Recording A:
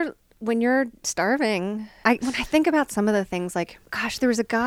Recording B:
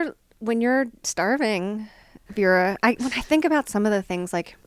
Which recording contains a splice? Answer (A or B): A